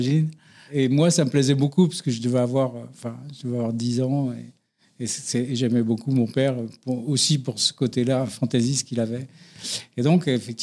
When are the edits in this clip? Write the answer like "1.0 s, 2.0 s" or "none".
none